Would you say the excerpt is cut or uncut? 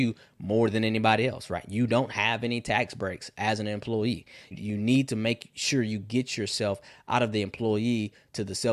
cut